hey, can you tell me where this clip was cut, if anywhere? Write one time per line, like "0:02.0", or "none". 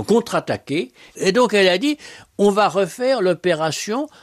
0:01.1